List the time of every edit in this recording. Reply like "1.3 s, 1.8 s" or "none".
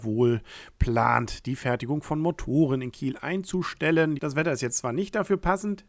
4.2 s